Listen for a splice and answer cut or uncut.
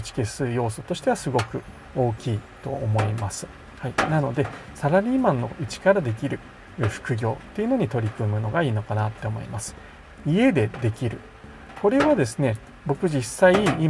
cut